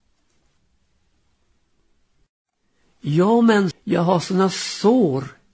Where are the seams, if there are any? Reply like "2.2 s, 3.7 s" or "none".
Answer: 3.7 s

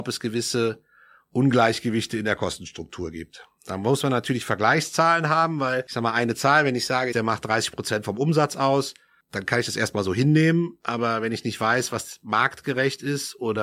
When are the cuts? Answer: 7.1 s

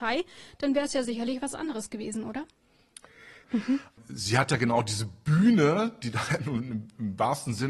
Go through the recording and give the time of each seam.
3.4 s

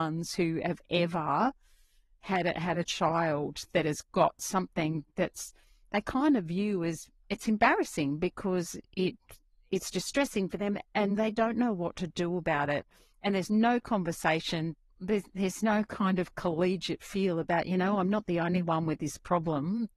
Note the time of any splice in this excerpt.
none

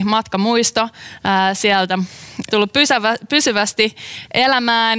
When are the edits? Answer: 2.5 s

